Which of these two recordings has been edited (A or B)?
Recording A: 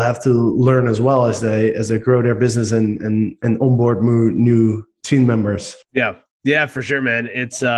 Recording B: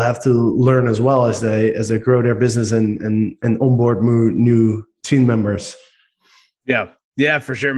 A